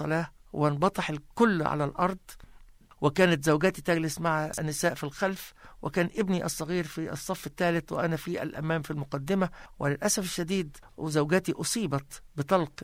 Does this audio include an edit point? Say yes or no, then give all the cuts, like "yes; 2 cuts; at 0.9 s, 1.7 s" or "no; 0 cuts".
no; 0 cuts